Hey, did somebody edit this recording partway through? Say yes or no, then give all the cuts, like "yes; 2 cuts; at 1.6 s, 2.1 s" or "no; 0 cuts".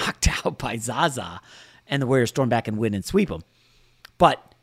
no; 0 cuts